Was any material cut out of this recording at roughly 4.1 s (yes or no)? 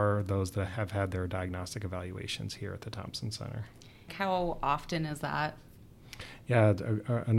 yes